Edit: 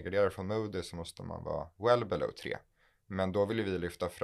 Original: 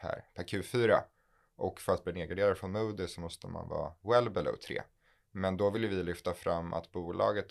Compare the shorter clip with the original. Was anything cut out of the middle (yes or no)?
no